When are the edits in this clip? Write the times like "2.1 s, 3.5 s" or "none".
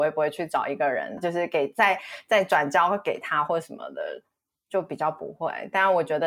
1.2 s

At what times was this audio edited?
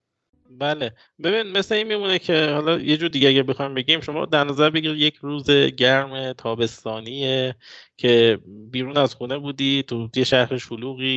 none

